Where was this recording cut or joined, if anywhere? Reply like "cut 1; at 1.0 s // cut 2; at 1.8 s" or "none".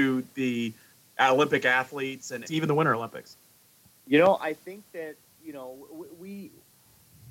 cut 1; at 2.5 s

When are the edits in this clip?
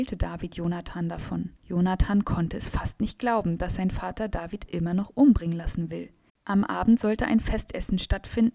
cut 1; at 1.6 s // cut 2; at 6.3 s

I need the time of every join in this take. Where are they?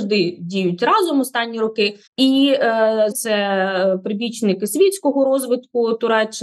cut 1; at 2.1 s // cut 2; at 3.1 s

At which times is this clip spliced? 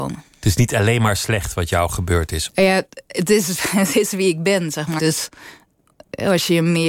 cut 1; at 2.5 s // cut 2; at 5.0 s

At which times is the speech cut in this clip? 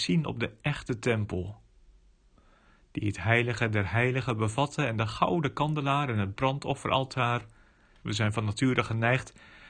cut 1; at 8.0 s

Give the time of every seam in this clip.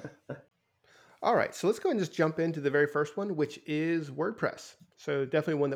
none

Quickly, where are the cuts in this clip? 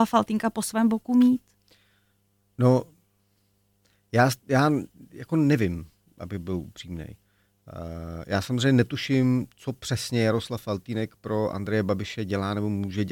none

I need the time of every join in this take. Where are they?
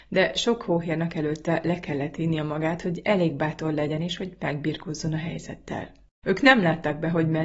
cut 1; at 6.2 s

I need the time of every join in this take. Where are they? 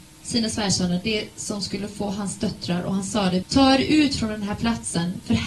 cut 1; at 3.4 s

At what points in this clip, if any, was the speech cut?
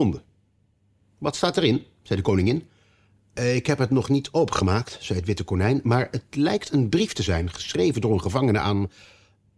none

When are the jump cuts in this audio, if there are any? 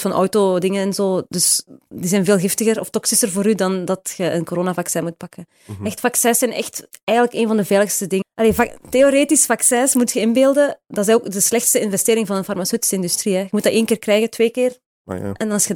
cut 1; at 8.2 s

